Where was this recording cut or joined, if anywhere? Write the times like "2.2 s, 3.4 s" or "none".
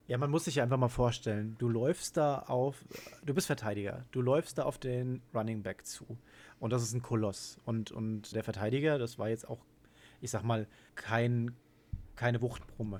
8.3 s, 10.9 s